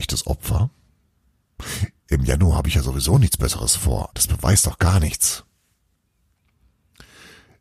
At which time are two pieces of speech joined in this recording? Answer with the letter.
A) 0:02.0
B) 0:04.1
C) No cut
B